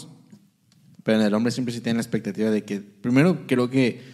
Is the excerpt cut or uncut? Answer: cut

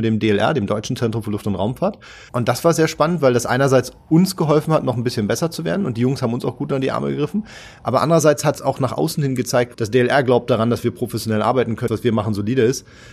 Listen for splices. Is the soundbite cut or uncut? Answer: cut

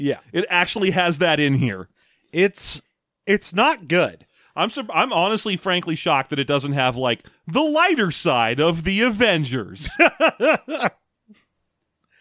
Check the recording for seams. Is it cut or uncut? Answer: uncut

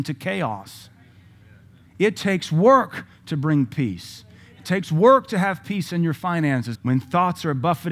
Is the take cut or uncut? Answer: cut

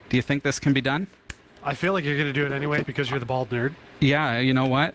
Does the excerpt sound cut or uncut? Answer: cut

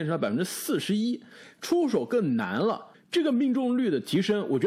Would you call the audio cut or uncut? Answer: cut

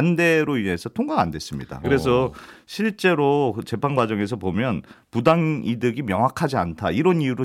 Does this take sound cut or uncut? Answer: cut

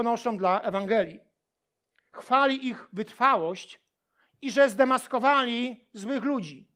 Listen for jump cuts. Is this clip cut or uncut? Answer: uncut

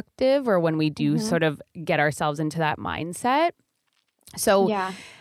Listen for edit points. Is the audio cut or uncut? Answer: uncut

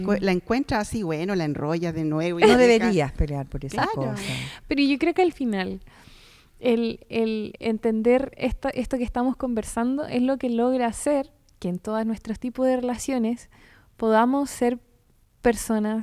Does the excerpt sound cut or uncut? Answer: uncut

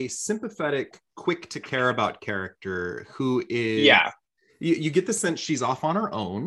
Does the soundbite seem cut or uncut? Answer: uncut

